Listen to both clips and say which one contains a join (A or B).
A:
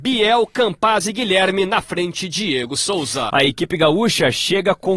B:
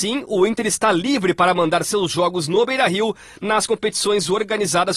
A